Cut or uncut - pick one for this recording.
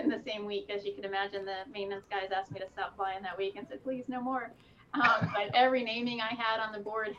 cut